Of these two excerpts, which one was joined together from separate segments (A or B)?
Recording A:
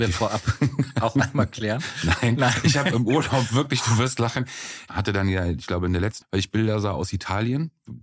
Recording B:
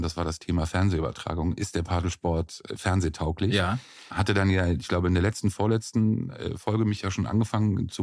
A